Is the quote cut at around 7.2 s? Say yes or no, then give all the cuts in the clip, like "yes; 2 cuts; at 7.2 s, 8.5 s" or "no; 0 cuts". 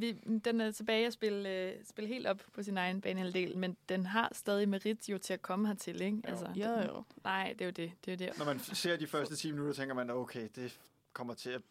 yes; 3 cuts; at 3.5 s, 7.2 s, 8.3 s